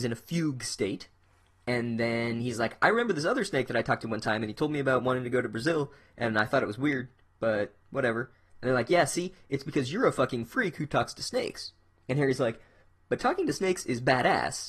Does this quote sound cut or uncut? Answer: uncut